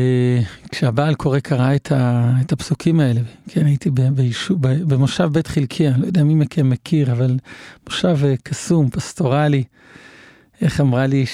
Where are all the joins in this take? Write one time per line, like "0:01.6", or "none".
none